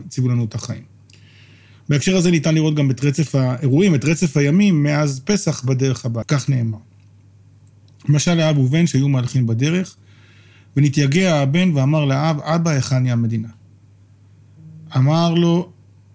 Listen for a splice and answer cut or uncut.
cut